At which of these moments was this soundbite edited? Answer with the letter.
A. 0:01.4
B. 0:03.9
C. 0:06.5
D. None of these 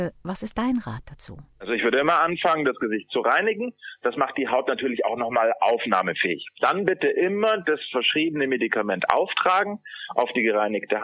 D